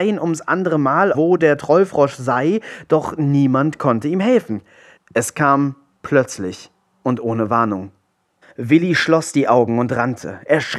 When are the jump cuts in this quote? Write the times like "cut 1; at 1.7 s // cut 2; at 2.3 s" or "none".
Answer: cut 1; at 1.1 s // cut 2; at 5.0 s // cut 3; at 8.4 s